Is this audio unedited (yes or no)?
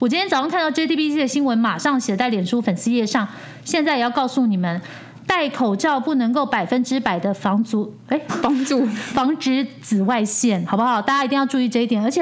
no